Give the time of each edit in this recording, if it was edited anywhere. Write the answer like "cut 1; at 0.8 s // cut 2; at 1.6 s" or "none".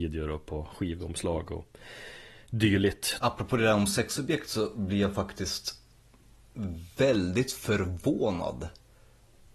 cut 1; at 3.2 s